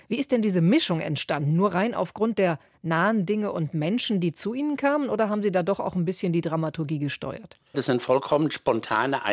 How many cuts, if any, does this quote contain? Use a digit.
1